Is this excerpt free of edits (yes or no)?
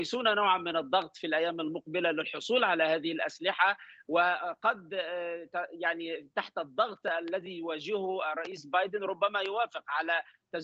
yes